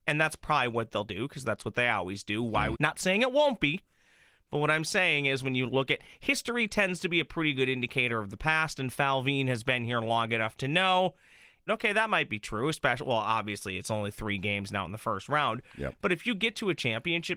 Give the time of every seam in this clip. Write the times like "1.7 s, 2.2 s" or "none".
2.7 s, 11.7 s